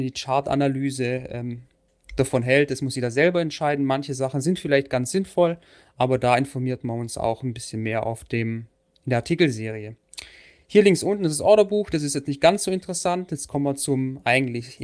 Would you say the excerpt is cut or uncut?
uncut